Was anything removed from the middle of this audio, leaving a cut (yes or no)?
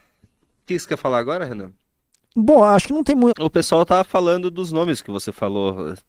yes